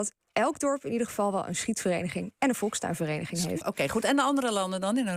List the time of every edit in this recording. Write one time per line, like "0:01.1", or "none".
0:03.6